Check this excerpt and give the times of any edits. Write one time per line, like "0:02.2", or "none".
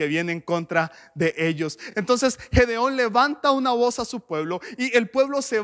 none